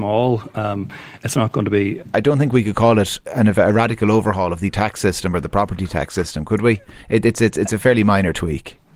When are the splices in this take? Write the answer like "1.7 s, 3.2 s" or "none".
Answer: 2.1 s